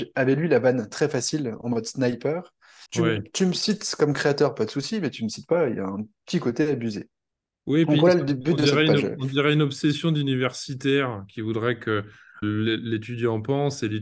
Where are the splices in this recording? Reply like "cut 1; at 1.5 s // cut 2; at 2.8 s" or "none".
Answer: cut 1; at 2.9 s // cut 2; at 12.4 s